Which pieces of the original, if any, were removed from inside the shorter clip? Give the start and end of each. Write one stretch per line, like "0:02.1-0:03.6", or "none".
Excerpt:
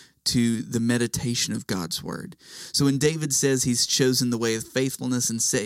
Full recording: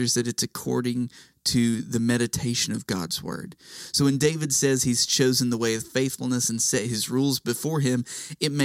none